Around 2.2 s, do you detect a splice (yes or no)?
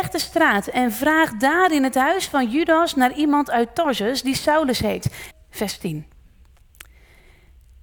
no